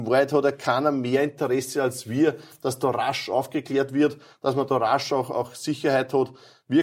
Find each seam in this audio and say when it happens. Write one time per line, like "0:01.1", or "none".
none